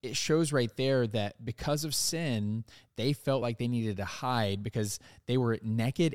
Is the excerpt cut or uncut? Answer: uncut